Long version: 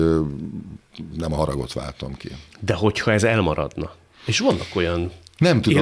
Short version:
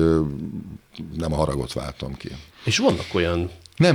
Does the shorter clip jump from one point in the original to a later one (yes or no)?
yes